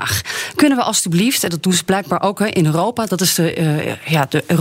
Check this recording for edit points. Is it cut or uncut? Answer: uncut